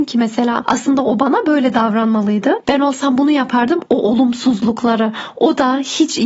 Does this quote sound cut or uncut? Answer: cut